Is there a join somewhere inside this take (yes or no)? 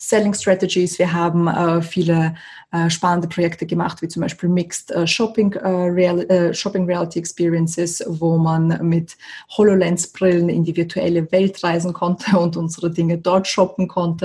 no